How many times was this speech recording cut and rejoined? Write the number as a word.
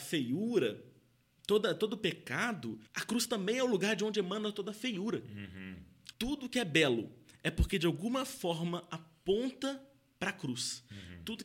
two